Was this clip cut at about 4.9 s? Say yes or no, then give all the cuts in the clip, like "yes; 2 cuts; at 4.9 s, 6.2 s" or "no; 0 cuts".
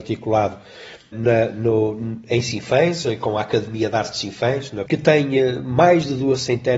yes; 2 cuts; at 1.1 s, 4.9 s